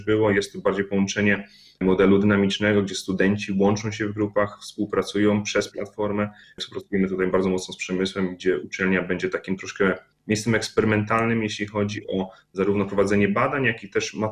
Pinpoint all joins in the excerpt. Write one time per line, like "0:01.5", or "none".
0:06.4